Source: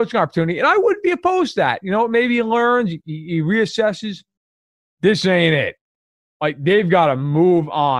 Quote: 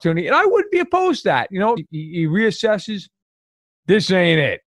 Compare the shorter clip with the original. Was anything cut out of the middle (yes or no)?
yes